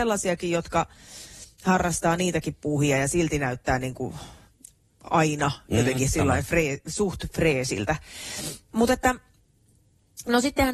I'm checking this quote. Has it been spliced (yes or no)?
no